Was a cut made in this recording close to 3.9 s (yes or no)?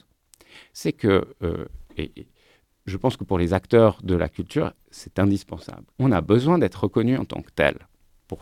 no